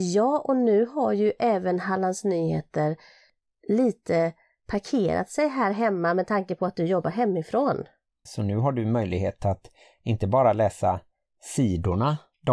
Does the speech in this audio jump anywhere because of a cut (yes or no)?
yes